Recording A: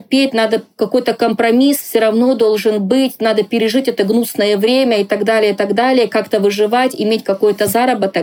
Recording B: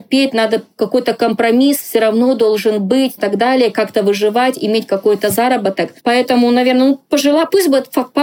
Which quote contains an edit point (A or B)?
B